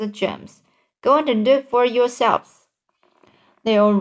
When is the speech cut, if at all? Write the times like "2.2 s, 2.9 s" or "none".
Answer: none